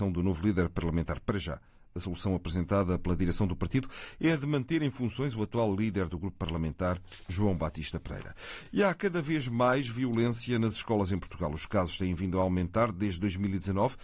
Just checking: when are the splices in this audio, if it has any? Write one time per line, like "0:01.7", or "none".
none